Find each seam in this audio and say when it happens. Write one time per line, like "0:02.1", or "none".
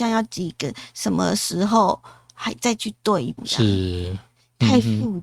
0:03.4